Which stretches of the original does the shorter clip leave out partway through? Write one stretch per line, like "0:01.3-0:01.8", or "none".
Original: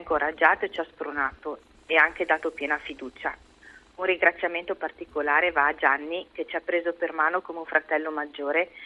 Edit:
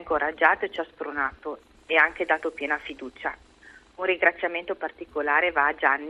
none

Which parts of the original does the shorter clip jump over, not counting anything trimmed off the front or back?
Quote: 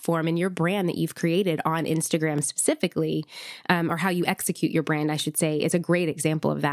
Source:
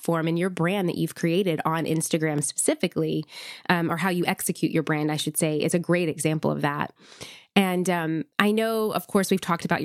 none

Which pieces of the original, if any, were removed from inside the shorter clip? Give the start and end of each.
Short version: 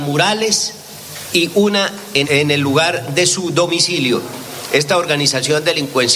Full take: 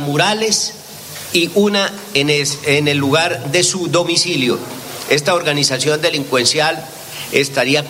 0:02.2-0:02.6

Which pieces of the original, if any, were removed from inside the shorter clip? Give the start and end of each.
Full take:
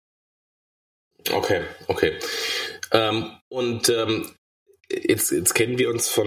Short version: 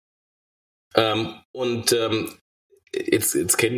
0:00.9-0:02.9

